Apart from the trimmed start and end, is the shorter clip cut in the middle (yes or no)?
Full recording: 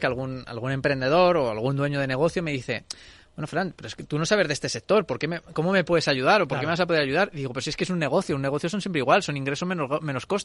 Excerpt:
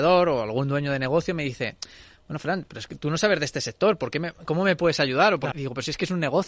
yes